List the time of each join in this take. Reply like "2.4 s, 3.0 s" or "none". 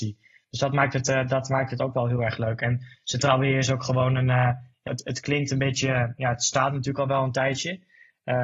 4.9 s